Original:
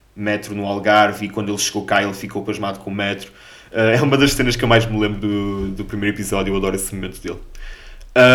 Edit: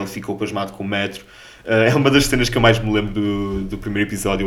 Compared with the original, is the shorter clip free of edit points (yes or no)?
yes